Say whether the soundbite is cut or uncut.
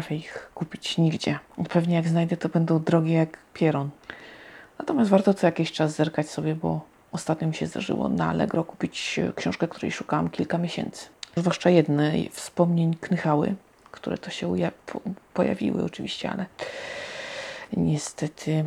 cut